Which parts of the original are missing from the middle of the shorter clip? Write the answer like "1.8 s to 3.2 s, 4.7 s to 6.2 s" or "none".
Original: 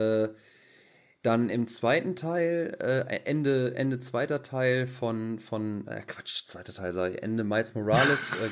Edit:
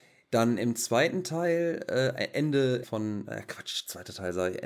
3.7 s to 5.4 s